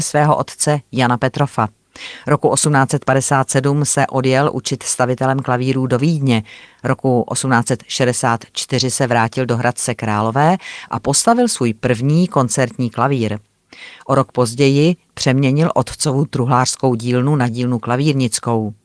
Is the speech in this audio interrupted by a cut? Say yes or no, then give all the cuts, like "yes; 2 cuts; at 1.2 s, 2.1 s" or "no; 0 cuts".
no; 0 cuts